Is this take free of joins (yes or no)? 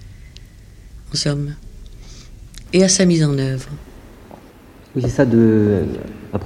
no